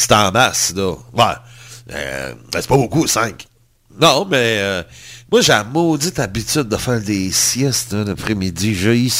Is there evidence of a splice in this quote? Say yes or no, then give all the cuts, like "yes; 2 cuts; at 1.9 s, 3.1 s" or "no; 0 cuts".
no; 0 cuts